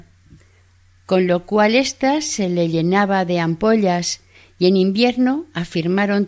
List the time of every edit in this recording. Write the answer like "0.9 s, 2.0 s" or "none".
none